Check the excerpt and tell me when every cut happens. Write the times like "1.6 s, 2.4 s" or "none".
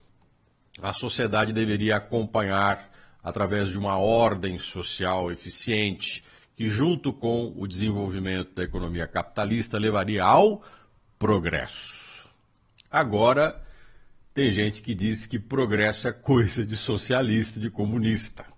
none

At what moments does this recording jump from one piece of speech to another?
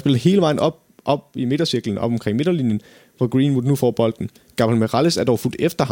none

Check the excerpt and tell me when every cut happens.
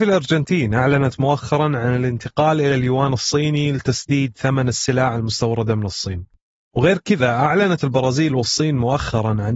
6.6 s

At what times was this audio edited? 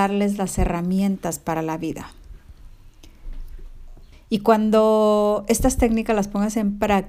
4.1 s

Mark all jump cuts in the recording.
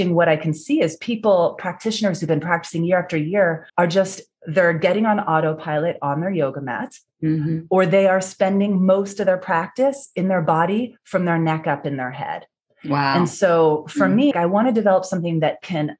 3.7 s, 14.3 s

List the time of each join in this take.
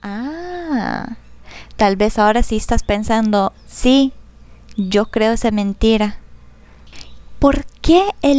3.5 s

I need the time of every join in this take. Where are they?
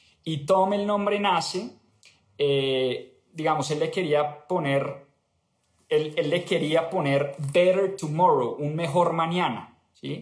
none

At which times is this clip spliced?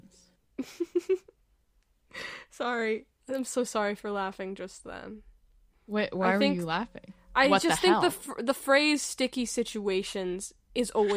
none

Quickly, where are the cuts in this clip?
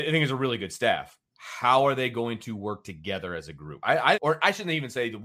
4.1 s

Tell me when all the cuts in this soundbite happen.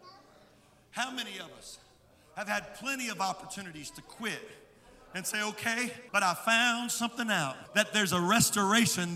6.1 s, 7.7 s

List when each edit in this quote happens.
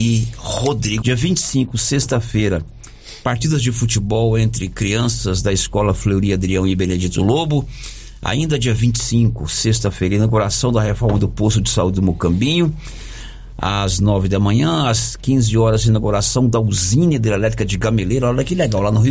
1.0 s

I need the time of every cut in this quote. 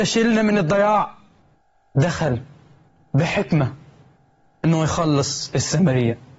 none

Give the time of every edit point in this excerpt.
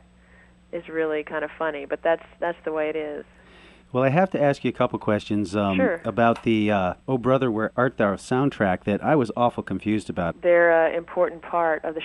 7.0 s, 10.3 s

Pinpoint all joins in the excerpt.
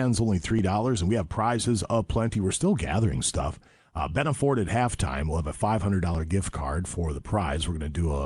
none

